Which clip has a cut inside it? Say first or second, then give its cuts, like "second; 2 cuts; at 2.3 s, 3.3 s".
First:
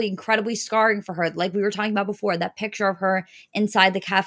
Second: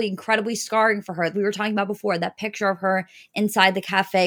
second; 1 cut; at 1.3 s